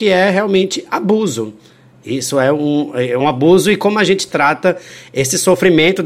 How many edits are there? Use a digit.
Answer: 1